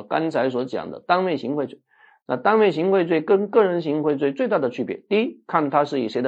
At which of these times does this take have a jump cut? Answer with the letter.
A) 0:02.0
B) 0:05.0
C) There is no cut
C